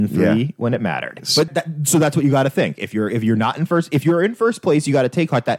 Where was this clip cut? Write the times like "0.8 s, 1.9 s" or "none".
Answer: 1.5 s